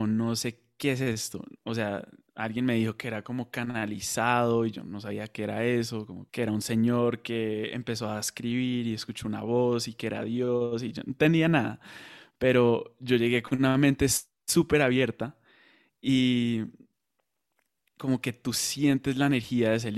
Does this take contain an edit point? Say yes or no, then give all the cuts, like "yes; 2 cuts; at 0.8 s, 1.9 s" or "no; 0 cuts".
yes; 1 cut; at 6.3 s